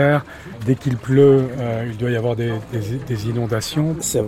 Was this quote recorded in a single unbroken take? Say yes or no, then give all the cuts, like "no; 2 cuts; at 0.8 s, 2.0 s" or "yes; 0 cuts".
yes; 0 cuts